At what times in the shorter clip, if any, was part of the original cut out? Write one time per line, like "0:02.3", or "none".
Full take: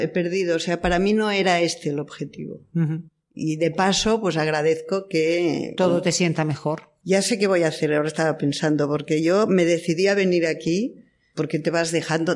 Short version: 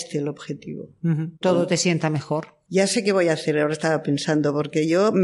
0:01.4

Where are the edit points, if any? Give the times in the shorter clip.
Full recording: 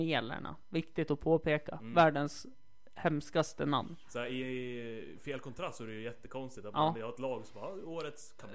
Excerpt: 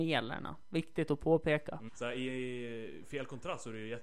0:01.9

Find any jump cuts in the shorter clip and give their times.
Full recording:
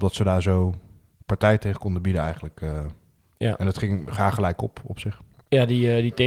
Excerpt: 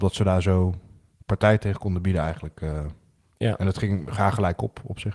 none

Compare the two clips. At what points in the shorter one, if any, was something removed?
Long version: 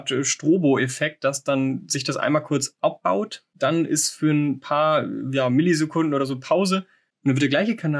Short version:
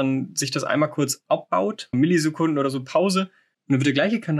0:01.9

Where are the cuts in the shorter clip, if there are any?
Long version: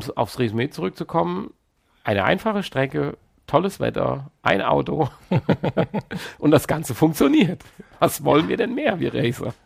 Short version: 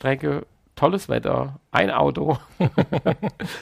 none

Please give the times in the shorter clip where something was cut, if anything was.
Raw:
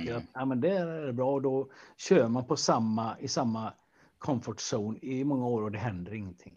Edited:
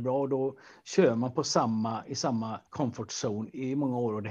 0:02.7

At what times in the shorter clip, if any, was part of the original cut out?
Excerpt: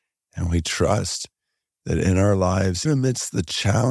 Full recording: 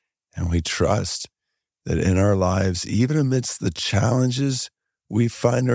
0:02.8

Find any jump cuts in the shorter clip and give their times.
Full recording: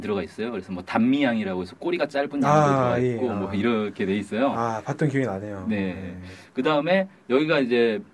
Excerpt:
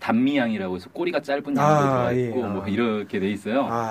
none

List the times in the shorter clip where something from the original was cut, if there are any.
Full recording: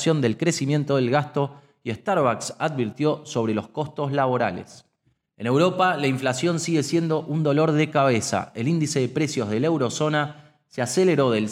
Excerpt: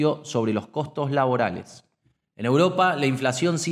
none

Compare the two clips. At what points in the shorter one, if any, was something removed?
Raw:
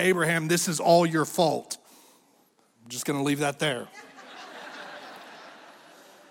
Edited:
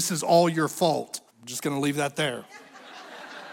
0:01.3

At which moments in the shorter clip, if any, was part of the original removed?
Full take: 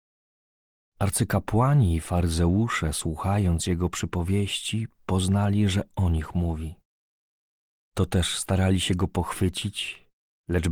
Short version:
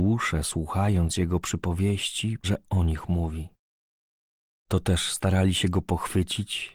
0:02.4

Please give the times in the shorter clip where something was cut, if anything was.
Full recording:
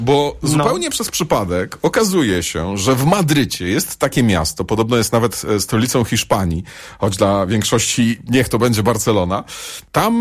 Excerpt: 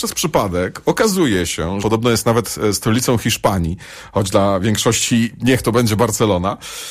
0:01.8

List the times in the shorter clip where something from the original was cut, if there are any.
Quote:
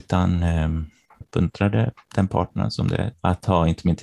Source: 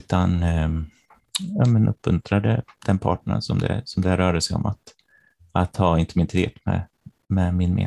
0:01.2
0:03.1

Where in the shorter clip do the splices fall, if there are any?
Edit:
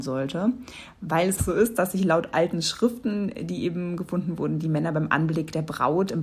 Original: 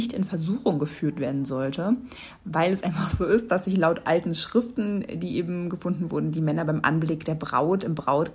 0:01.4

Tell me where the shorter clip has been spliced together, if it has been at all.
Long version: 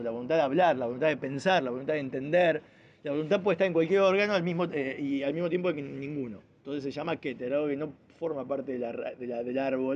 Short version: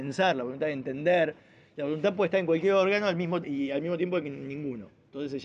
0:03.4

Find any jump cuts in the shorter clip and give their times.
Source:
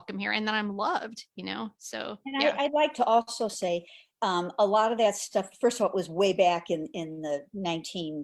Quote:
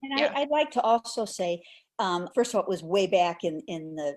0:02.3

